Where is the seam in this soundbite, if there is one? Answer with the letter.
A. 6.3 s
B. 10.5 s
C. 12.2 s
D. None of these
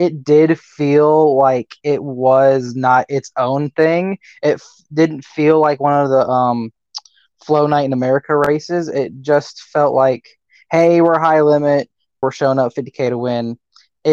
C